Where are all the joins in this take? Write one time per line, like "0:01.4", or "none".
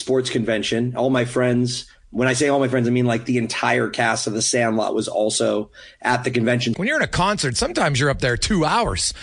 0:06.7